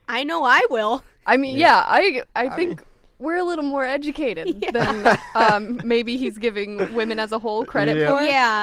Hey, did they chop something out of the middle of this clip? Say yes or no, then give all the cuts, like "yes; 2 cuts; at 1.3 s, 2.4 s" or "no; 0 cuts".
no; 0 cuts